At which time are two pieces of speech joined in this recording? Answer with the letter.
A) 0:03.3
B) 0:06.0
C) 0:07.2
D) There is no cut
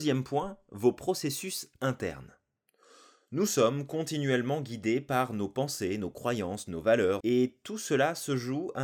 C